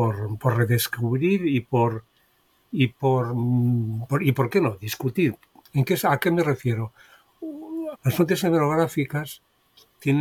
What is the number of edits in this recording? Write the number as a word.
one